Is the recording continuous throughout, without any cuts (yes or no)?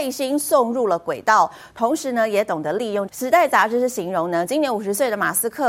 no